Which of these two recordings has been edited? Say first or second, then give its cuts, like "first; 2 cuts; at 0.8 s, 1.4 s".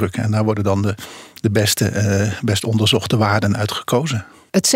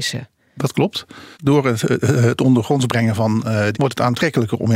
second; 2 cuts; at 1.3 s, 3.7 s